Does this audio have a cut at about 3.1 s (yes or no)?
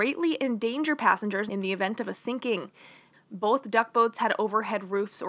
yes